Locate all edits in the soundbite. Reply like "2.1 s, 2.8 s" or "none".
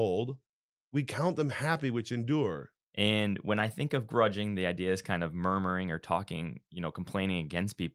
2.8 s